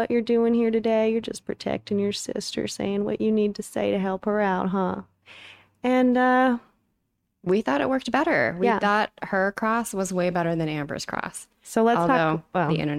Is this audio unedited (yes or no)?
yes